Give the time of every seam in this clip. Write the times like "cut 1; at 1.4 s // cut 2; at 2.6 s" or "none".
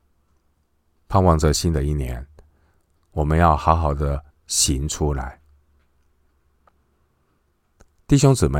cut 1; at 4.3 s